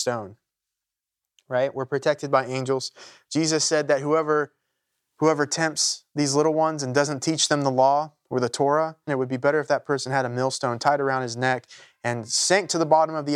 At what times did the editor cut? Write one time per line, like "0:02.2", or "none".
0:09.1